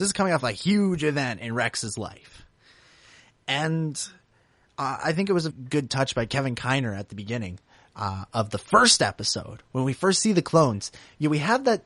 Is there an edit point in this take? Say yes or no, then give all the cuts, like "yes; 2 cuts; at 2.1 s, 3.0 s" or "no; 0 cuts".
yes; 1 cut; at 5.5 s